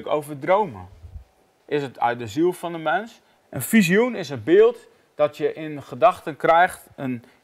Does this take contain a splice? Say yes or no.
yes